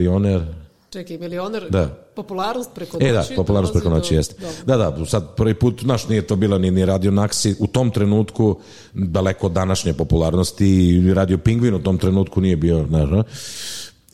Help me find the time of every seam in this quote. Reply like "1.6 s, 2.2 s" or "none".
none